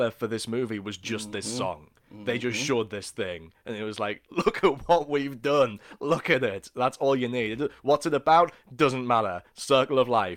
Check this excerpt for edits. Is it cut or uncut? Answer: uncut